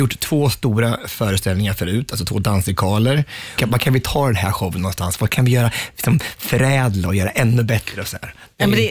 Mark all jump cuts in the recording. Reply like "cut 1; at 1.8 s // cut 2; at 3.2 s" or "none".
cut 1; at 3.6 s